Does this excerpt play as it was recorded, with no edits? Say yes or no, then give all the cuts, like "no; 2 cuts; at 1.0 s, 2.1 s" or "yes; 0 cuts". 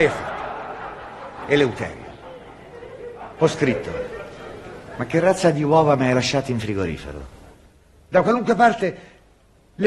yes; 0 cuts